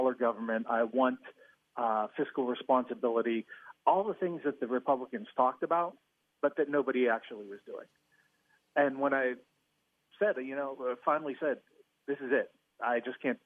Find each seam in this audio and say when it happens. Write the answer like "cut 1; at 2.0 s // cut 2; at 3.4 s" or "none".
none